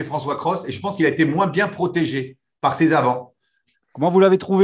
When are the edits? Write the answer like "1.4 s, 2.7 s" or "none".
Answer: 3.7 s